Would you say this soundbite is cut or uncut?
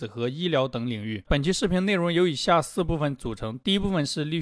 cut